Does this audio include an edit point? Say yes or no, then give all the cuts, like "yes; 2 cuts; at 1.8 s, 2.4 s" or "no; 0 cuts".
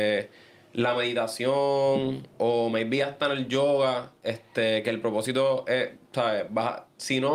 no; 0 cuts